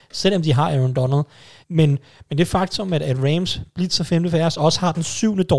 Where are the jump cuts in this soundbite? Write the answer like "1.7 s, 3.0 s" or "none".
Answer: 1.6 s